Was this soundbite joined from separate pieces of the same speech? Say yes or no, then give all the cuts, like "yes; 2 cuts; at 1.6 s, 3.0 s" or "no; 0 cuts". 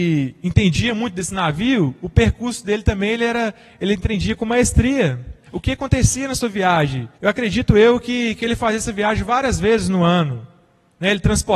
yes; 2 cuts; at 5.4 s, 7.1 s